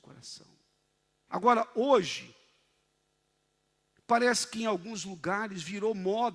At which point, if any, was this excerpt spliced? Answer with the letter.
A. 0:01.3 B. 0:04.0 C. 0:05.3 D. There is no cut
A